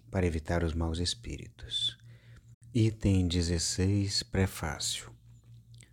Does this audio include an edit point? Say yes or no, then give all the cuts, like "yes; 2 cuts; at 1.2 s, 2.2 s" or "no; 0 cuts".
yes; 1 cut; at 2.5 s